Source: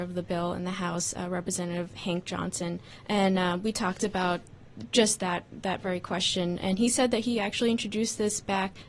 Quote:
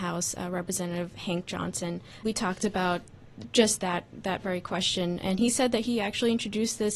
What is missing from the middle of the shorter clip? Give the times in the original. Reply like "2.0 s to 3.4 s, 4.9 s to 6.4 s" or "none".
3.0 s to 3.6 s